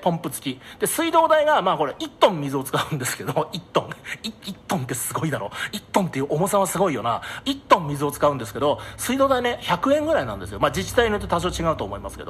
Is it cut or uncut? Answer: uncut